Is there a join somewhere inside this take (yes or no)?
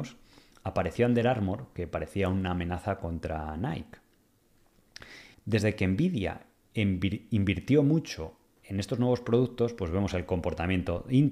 yes